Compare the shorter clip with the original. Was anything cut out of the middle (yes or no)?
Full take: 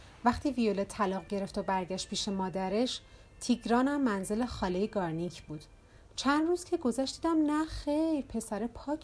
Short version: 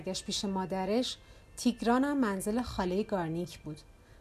no